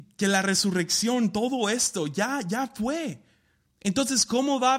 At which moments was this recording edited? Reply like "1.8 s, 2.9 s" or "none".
3.7 s